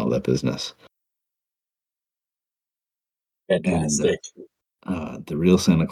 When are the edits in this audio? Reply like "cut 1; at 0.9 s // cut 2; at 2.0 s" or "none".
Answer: none